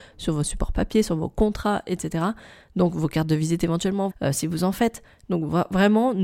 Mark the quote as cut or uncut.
cut